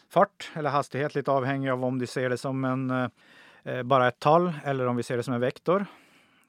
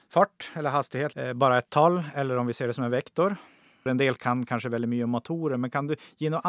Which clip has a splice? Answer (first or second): second